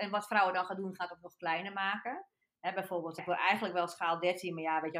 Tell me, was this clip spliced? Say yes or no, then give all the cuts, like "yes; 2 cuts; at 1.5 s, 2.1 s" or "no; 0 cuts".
yes; 1 cut; at 3.2 s